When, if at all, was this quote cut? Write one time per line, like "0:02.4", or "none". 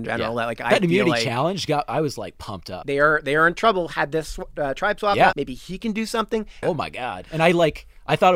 0:02.8
0:05.3
0:06.6

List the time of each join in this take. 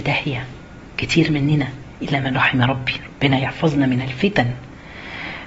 none

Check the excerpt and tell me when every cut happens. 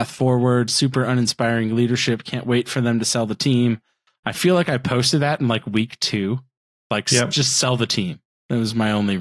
none

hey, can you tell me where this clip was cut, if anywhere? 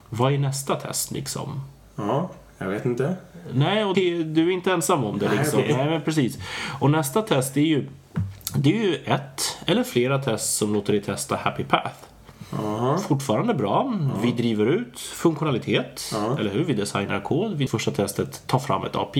0:03.9
0:17.7

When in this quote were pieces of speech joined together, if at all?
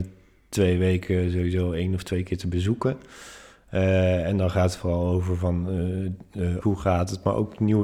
0:06.6

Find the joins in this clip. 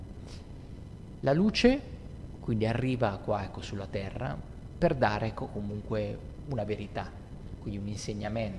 none

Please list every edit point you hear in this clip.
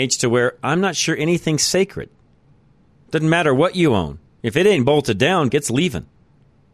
0:05.5

